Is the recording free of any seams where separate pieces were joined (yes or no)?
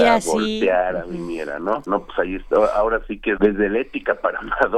no